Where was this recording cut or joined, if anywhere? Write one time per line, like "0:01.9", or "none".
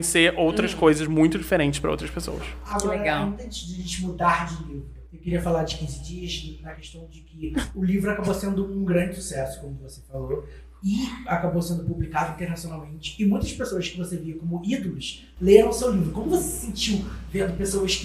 0:05.1